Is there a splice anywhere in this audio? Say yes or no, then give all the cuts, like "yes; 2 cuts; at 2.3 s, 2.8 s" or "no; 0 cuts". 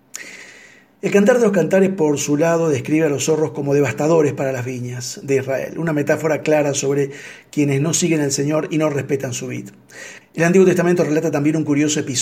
yes; 1 cut; at 10.2 s